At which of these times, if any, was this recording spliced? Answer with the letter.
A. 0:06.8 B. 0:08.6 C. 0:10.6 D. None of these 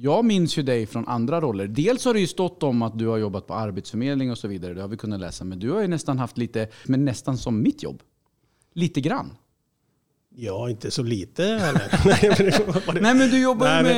A